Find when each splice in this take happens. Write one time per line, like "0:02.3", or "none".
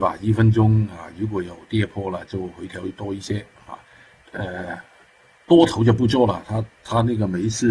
0:04.2